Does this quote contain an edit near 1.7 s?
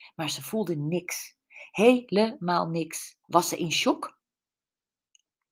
no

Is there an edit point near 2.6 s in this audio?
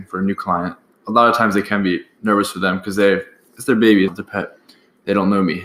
no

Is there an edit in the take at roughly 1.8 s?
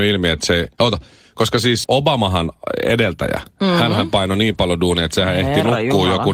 yes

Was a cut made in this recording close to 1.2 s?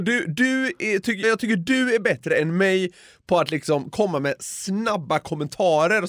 yes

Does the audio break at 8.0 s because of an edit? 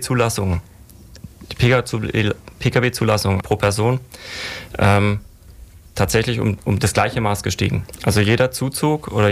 no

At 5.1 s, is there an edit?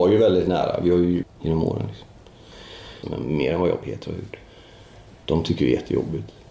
no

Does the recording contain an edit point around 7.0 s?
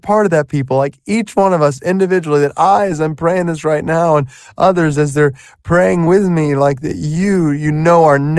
no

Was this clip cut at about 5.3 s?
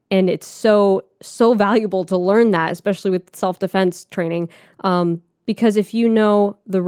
no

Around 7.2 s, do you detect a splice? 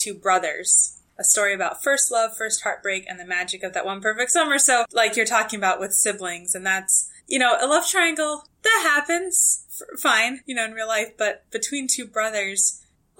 yes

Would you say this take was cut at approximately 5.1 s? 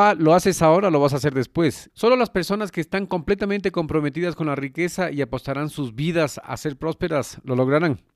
no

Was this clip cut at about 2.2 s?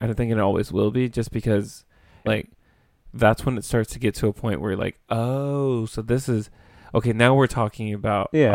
yes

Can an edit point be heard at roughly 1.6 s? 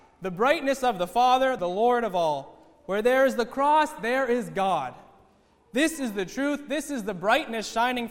yes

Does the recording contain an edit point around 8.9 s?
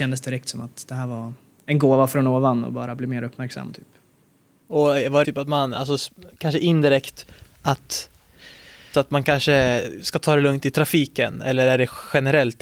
yes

